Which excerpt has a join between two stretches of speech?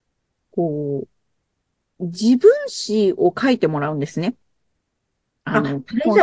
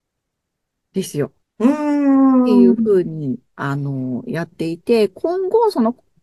second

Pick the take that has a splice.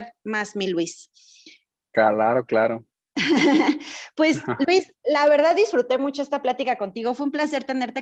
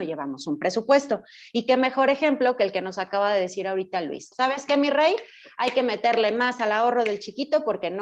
second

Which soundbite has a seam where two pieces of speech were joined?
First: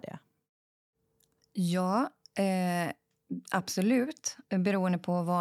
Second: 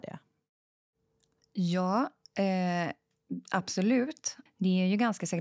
second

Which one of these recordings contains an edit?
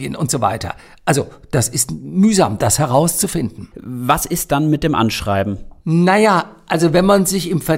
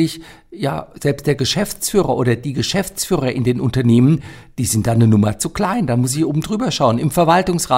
first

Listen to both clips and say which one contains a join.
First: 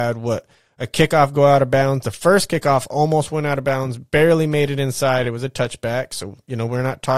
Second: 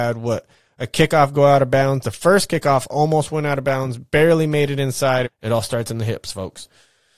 second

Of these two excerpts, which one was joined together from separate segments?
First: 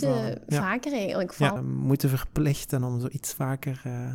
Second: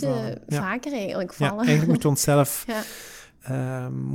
first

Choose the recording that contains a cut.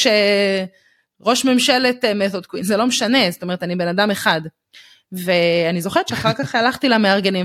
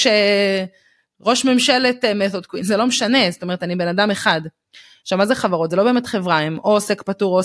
second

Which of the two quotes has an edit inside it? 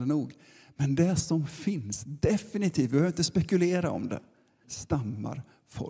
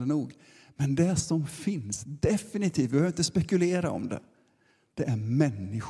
first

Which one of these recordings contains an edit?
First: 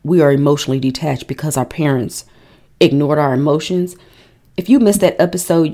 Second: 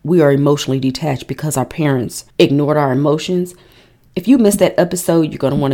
second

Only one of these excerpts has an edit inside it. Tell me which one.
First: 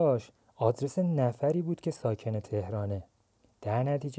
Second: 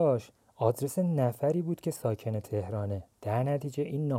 second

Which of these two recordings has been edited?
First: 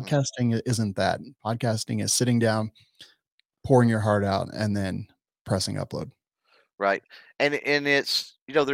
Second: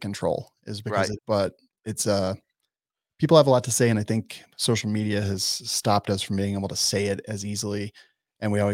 second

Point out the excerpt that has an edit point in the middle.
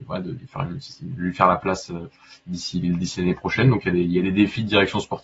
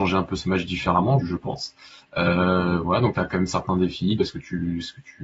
second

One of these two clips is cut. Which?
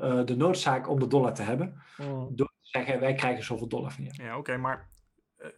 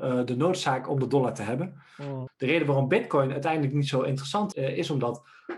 second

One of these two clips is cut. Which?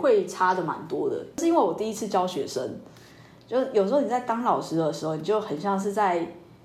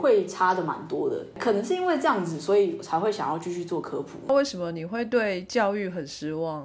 first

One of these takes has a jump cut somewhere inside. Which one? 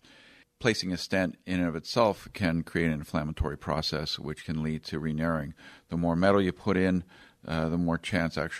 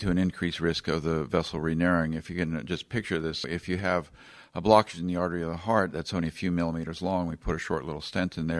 second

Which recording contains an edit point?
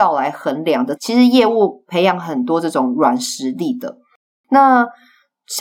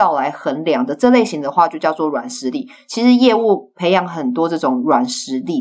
first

